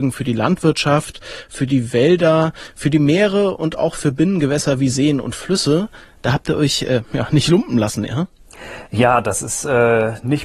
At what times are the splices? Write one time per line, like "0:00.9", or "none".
none